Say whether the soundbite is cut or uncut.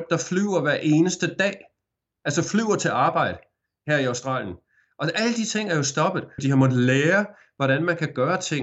cut